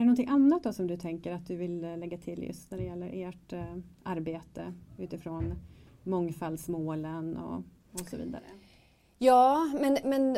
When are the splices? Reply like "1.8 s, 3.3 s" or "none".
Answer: none